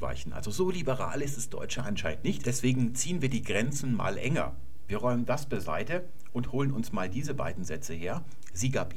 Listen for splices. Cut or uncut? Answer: cut